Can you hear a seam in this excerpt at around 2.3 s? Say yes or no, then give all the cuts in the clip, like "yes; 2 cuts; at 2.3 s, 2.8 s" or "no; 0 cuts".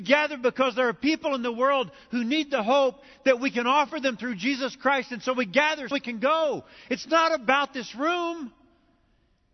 no; 1 cut; at 5.9 s